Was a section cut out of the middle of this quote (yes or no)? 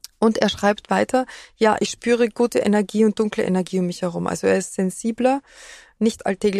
no